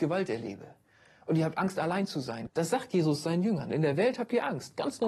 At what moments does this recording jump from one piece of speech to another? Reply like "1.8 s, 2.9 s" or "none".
2.5 s